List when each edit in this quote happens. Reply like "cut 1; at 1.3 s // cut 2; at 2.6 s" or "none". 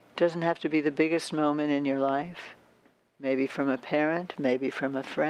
cut 1; at 4.4 s

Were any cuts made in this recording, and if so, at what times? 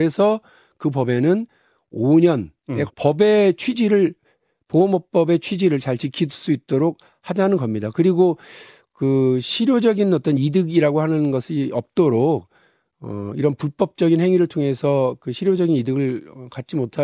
cut 1; at 2.9 s

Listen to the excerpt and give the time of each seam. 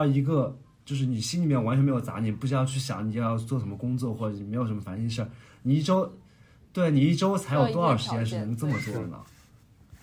none

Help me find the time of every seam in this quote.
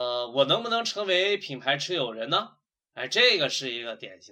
cut 1; at 2.8 s

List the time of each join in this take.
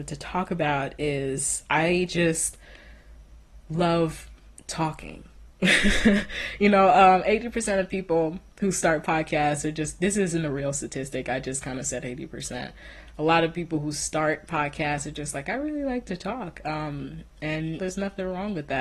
cut 1; at 17.8 s

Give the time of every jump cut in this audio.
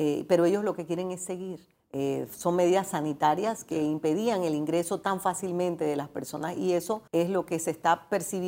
cut 1; at 1.8 s // cut 2; at 7.1 s

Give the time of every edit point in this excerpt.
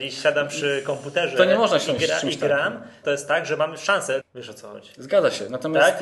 cut 1; at 3.0 s // cut 2; at 4.2 s

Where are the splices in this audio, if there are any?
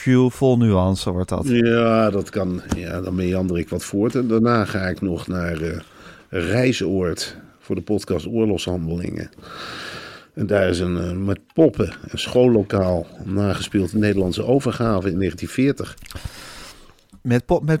none

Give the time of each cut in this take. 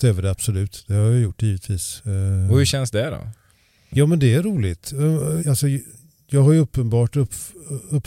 cut 1; at 5.4 s

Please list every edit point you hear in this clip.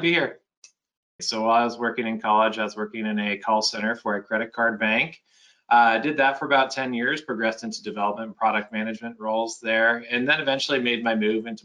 cut 1; at 1.2 s

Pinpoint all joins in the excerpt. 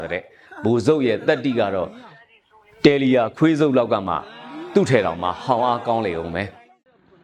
none

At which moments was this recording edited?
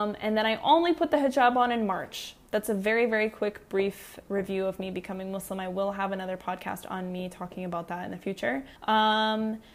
cut 1; at 8.8 s

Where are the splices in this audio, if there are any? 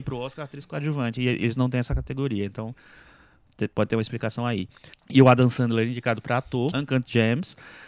cut 1; at 4.9 s // cut 2; at 6.7 s

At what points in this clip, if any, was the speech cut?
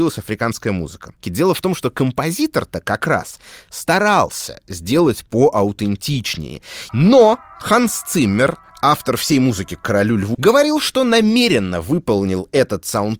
cut 1; at 1.2 s // cut 2; at 6.9 s // cut 3; at 10.3 s

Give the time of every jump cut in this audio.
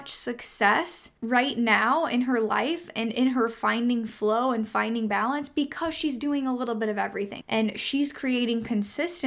cut 1; at 1.2 s // cut 2; at 7.4 s

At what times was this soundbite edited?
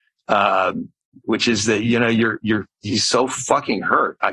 cut 1; at 1.2 s

